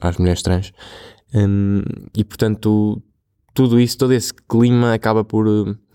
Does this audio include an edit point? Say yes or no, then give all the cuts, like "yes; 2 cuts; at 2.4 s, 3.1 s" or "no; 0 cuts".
no; 0 cuts